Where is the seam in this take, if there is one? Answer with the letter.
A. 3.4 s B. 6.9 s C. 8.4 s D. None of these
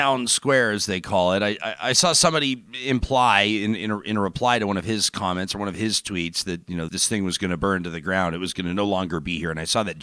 B